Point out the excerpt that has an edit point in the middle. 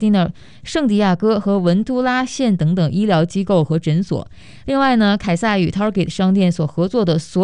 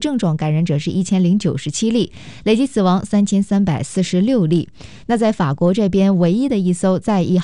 second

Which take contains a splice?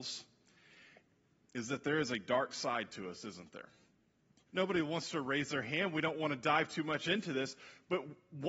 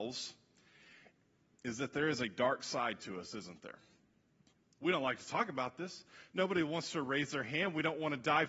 first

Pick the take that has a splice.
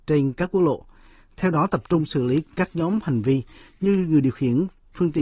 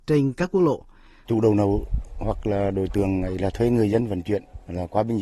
second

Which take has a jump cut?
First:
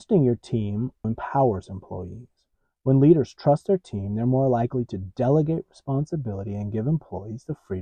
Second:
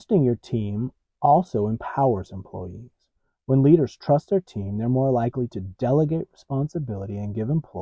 first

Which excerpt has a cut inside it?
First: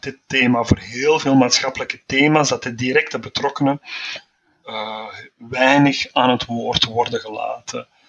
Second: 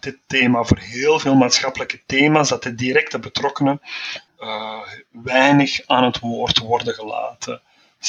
second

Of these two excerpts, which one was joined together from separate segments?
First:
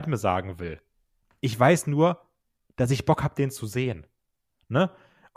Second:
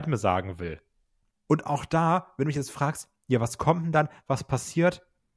second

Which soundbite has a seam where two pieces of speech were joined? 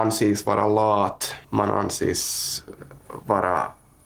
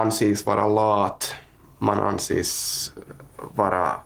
first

